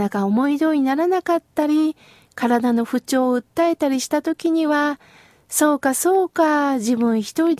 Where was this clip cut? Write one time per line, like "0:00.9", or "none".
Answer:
none